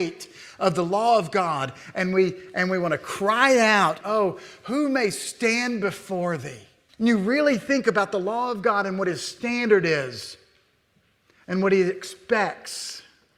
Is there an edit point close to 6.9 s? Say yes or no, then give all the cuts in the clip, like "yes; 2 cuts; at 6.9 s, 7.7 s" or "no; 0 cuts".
yes; 2 cuts; at 4.0 s, 6.9 s